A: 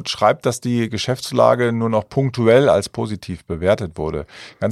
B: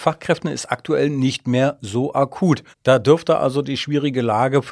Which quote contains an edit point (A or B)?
B